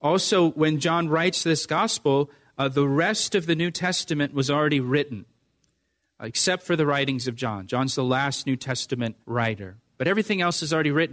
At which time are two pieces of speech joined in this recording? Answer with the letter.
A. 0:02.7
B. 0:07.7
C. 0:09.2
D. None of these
C